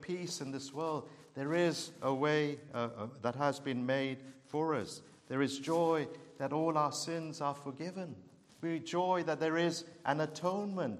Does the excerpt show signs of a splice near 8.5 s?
yes; 1 cut; at 8.5 s

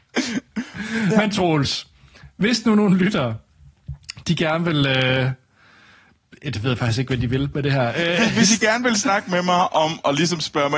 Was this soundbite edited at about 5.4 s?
no; 0 cuts

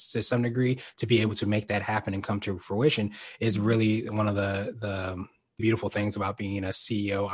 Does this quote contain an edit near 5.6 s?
yes; 1 cut; at 5.6 s

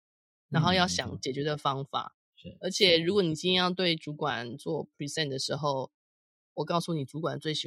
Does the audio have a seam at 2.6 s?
no; 0 cuts

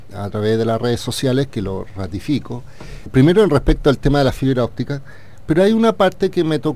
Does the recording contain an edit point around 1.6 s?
no; 2 cuts; at 3.1 s, 5.4 s

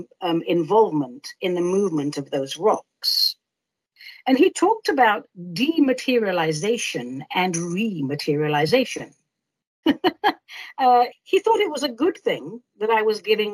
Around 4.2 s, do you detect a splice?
no; 2 cuts; at 9.8 s, 11.1 s

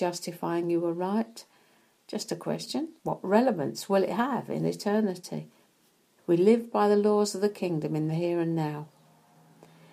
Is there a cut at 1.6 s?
no; 2 cuts; at 3.0 s, 6.2 s

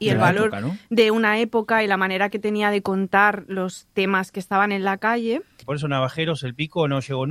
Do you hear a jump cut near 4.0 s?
no; 1 cut; at 5.6 s

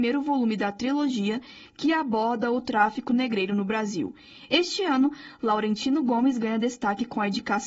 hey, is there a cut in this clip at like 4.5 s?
yes; 1 cut; at 4.5 s

